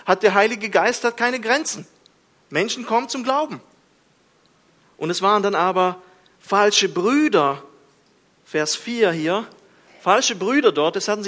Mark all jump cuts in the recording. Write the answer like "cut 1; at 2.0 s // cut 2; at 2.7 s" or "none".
cut 1; at 4.8 s